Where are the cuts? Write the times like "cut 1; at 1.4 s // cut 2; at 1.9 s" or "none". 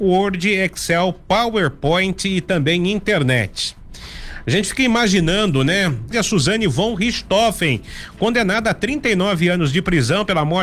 cut 1; at 6.1 s

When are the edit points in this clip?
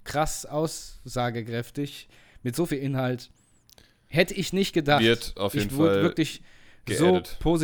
none

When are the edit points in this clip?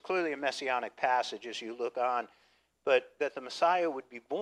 none

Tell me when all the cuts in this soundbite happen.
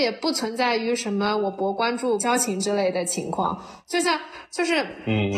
cut 1; at 2.2 s

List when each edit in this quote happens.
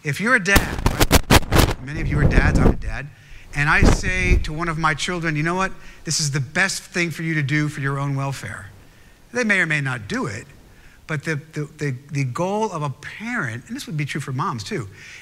none

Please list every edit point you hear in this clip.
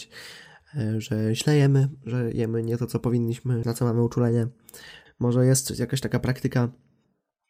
cut 1; at 3.6 s // cut 2; at 5.1 s

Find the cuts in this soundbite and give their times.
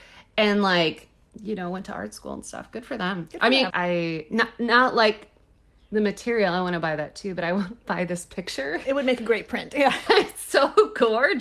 cut 1; at 3.7 s // cut 2; at 10.1 s

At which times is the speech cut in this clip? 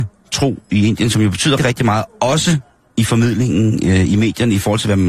cut 1; at 1.6 s

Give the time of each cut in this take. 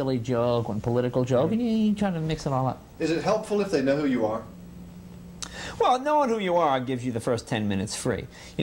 none

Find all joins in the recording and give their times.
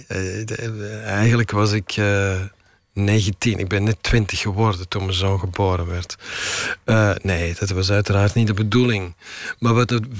none

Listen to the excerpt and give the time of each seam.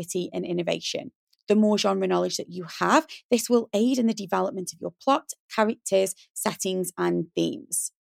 none

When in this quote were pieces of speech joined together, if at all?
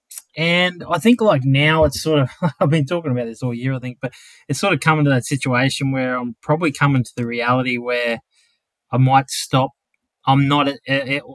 none

